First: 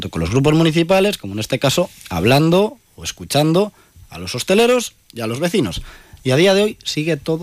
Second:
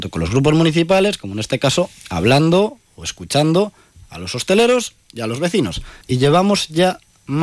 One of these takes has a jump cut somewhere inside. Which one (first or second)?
second